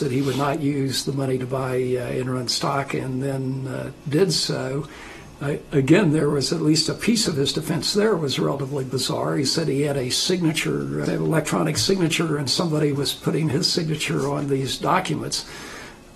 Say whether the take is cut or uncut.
cut